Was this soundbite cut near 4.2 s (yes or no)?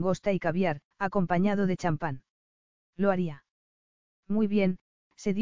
no